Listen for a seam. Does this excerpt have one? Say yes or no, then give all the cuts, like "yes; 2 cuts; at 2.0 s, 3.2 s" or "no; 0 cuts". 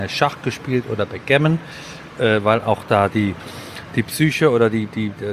no; 0 cuts